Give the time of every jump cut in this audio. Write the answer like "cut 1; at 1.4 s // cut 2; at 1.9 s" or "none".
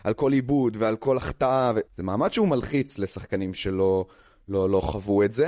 cut 1; at 1.9 s